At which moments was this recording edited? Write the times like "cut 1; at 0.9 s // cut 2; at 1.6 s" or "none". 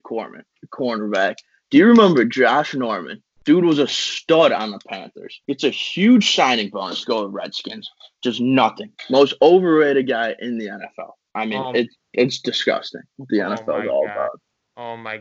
cut 1; at 5.4 s // cut 2; at 13.2 s